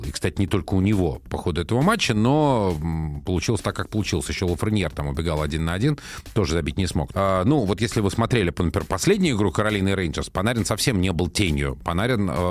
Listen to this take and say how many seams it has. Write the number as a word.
one